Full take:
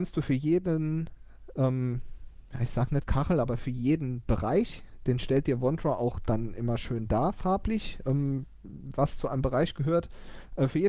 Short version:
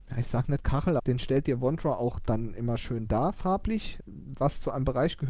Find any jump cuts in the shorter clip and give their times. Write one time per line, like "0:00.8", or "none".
0:01.0
0:04.0